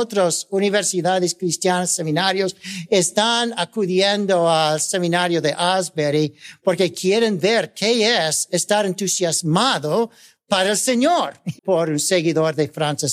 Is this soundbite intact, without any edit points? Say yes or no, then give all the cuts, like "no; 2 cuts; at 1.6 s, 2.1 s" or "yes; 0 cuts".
no; 1 cut; at 11.6 s